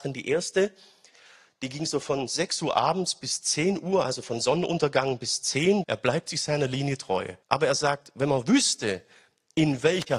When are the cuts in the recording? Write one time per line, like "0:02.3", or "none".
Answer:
0:05.8
0:07.4